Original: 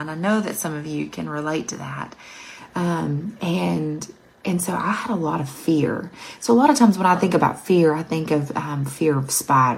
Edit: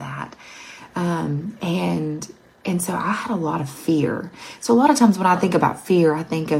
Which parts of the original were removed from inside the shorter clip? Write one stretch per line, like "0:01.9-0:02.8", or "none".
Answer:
none